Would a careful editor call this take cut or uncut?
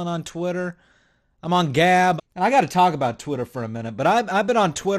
cut